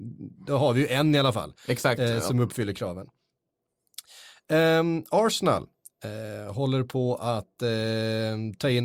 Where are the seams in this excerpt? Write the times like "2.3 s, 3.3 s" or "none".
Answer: none